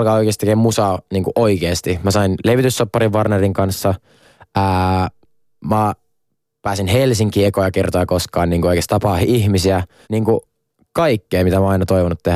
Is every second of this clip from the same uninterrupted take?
no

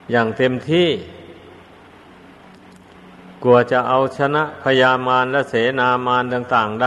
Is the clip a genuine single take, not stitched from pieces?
yes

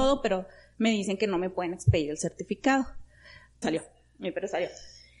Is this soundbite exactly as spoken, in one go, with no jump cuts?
no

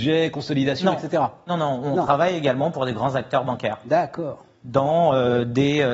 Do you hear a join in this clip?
no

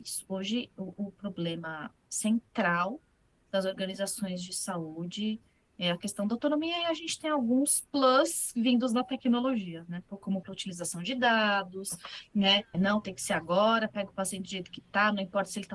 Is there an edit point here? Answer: yes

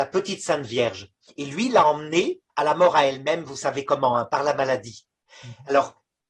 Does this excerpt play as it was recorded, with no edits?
no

